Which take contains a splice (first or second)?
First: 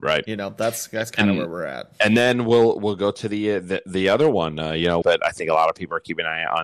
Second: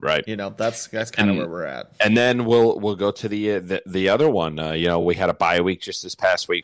first